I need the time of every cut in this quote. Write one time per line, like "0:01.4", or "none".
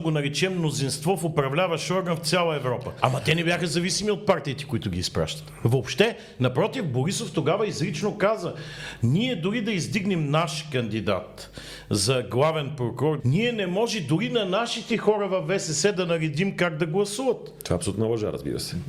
0:03.0
0:13.2